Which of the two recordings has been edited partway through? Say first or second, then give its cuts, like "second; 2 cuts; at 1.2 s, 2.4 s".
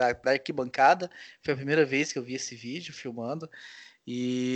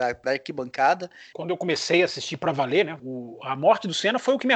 second; 2 cuts; at 1.3 s, 3.0 s